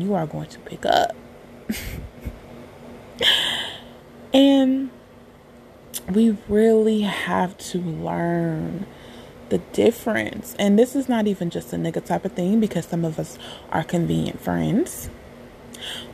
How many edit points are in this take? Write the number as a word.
zero